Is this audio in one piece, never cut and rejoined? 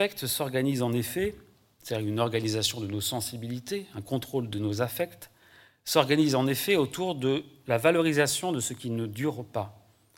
yes; 0 cuts

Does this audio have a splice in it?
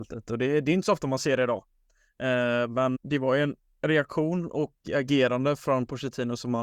yes; 1 cut; at 2.9 s

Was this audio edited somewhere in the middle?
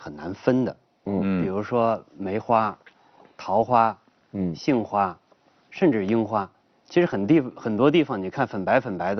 no; 0 cuts

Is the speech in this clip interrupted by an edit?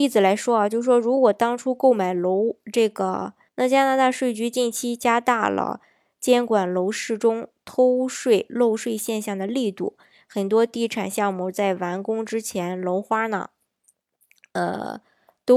yes; 1 cut; at 3.5 s

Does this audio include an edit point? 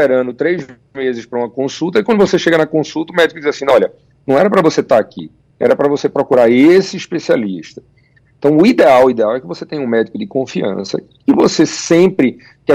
no; 0 cuts

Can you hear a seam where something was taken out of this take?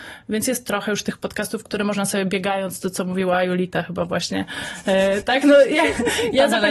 no; 0 cuts

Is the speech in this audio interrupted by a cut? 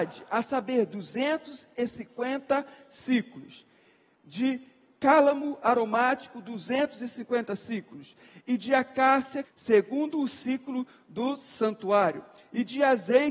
yes; 1 cut; at 9.4 s

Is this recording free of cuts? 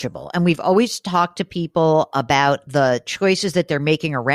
yes; 0 cuts

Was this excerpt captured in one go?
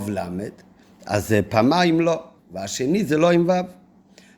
no; 1 cut; at 2.4 s

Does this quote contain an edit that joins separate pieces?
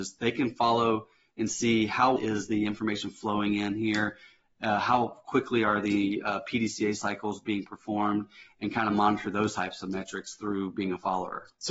yes; 1 cut; at 2.2 s

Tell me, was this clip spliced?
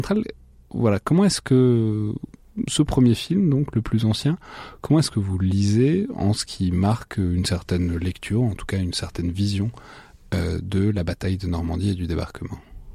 no; 0 cuts

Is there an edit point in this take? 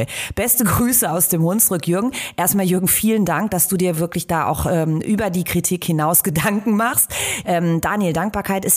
yes; 1 cut; at 7.4 s

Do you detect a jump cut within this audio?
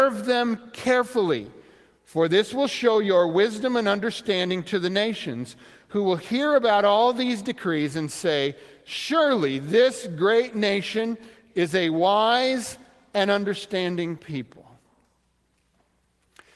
no; 0 cuts

